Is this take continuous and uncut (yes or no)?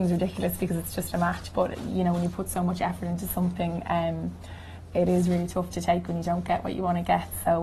yes